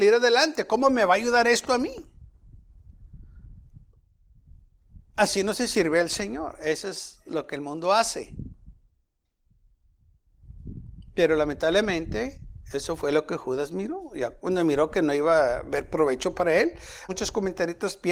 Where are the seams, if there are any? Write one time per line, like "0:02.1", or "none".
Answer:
0:17.1